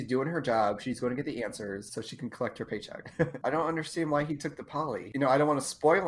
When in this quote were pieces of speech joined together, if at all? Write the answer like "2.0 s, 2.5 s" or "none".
3.4 s